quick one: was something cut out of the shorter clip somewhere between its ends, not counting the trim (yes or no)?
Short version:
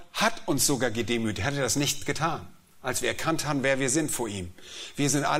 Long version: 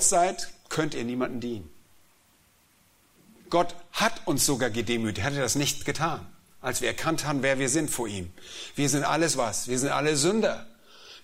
no